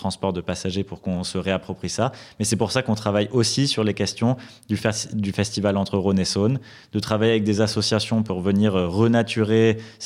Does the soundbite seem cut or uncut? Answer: uncut